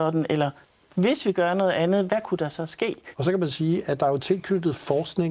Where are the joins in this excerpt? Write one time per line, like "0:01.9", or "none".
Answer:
0:03.1